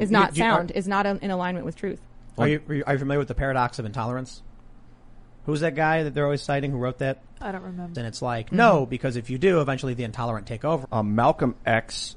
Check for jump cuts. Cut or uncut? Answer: cut